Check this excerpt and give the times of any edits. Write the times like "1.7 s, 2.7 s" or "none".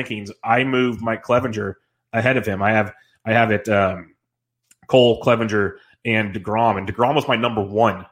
none